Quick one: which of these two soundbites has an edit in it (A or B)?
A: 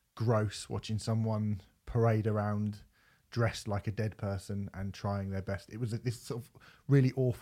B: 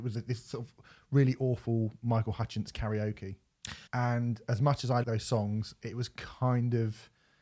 B